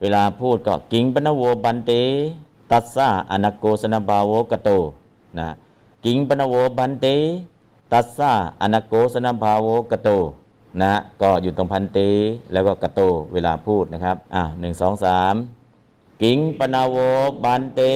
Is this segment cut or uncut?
cut